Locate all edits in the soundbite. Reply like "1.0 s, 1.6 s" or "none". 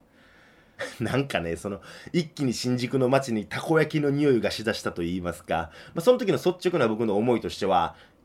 none